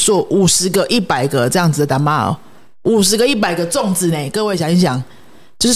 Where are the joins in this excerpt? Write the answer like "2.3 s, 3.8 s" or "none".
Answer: none